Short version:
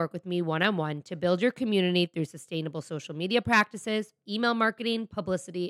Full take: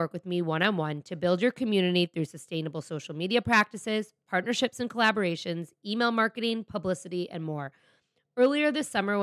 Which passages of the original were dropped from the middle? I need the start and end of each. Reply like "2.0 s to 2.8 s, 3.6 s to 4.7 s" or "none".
4.2 s to 5.8 s